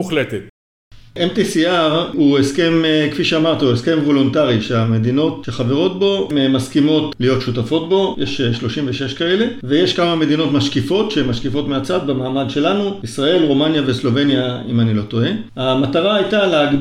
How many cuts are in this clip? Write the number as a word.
two